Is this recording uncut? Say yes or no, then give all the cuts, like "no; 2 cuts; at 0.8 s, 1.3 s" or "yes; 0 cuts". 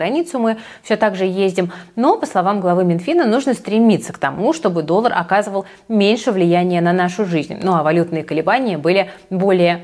yes; 0 cuts